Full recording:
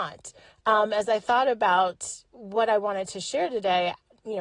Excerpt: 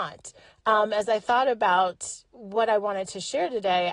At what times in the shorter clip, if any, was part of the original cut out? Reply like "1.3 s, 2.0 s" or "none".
none